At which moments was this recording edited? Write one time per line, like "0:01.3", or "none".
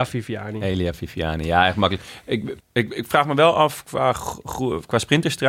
0:02.6